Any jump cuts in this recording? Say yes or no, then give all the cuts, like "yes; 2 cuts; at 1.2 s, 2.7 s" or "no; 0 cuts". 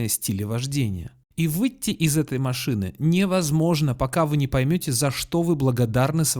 yes; 1 cut; at 1.2 s